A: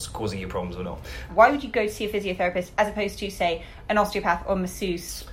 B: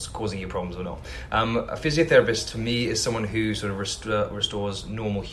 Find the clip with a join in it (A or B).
A